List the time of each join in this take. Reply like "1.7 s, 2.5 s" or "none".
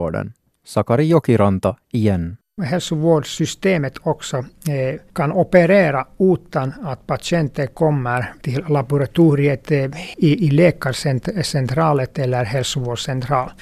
none